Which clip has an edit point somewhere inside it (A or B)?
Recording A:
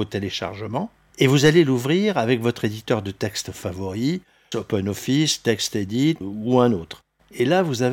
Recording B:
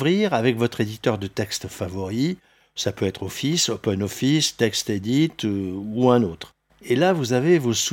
A